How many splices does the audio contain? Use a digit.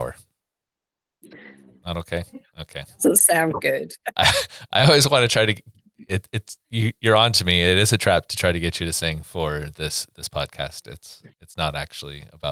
1